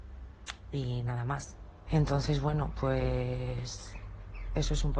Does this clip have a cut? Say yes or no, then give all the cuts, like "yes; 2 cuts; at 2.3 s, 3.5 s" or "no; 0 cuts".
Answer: yes; 1 cut; at 1.9 s